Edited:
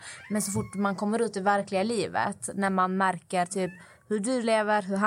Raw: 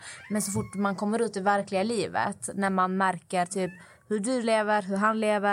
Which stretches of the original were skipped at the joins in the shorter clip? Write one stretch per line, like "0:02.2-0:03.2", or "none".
none